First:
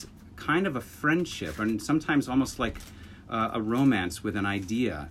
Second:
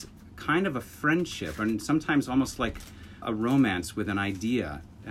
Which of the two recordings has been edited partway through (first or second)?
second